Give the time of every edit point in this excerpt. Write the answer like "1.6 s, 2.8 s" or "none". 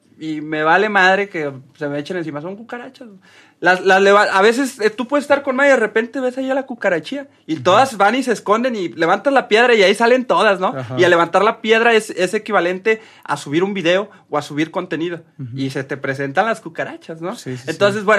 none